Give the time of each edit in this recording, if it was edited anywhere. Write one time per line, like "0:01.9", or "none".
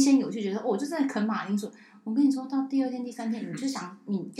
none